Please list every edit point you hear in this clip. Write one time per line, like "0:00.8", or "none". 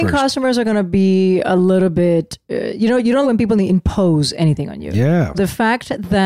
0:03.2
0:05.3